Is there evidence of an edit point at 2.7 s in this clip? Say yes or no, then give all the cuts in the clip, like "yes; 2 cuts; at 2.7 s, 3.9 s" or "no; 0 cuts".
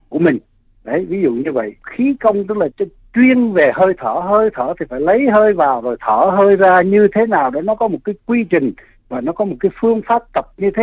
yes; 1 cut; at 2.7 s